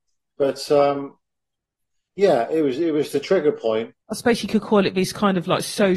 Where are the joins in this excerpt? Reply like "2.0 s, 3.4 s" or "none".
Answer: 4.0 s